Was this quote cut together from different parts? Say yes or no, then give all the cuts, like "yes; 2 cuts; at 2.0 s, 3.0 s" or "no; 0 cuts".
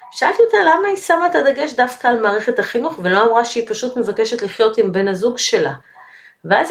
no; 0 cuts